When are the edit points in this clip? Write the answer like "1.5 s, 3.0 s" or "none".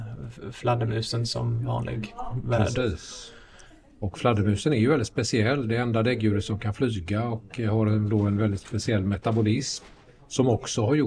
none